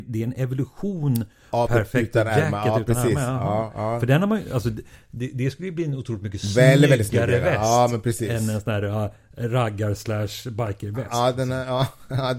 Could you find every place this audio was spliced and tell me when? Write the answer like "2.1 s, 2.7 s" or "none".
1.7 s

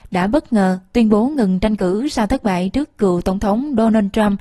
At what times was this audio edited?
none

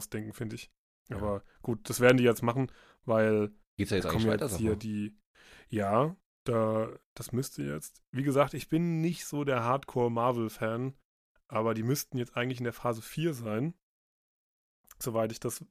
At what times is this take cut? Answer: none

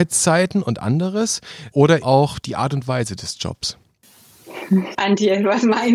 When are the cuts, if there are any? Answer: 2.0 s, 4.9 s

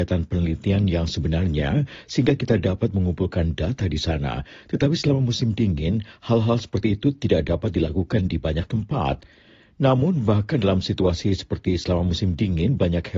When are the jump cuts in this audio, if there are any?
none

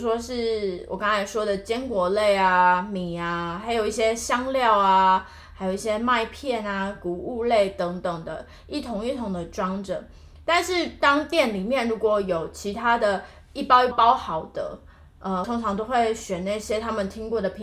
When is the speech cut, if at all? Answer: 13.9 s, 15.4 s

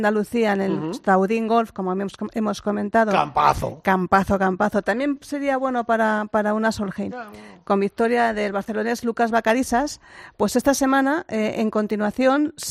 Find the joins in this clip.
none

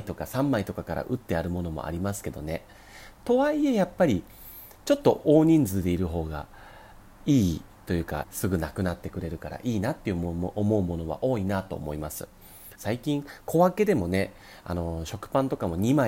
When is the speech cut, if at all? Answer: 8.2 s, 12.8 s

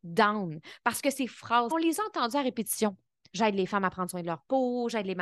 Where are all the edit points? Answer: 1.7 s, 3.3 s

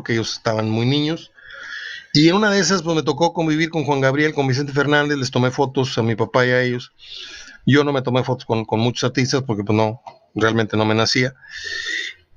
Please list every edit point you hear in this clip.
none

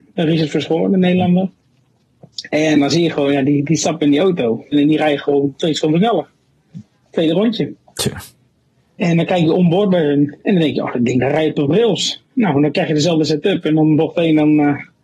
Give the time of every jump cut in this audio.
none

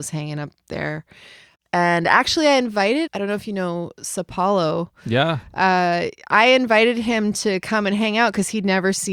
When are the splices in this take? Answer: 3.1 s

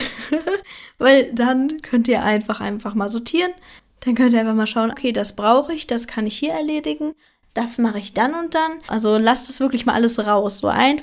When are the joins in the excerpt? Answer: 4.9 s, 8.9 s

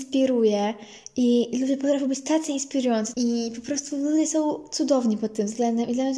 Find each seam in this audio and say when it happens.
3.1 s

